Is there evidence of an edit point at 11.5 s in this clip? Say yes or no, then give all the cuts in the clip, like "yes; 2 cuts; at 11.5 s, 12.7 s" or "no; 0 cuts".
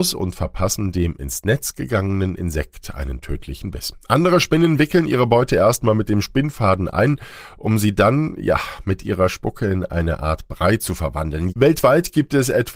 yes; 1 cut; at 11.5 s